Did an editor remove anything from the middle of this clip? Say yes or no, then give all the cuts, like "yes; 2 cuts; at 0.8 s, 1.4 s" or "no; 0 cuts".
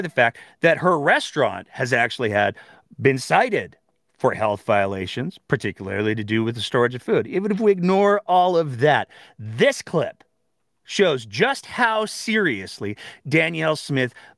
no; 0 cuts